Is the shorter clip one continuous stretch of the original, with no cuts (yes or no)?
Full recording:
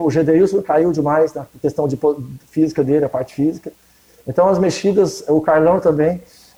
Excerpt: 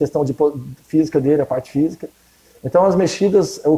yes